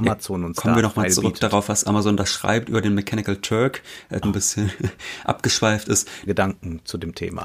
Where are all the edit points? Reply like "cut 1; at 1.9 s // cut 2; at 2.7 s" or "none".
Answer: cut 1; at 4.2 s // cut 2; at 6.3 s